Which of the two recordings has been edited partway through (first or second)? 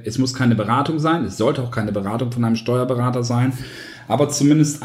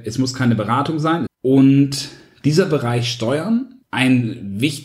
second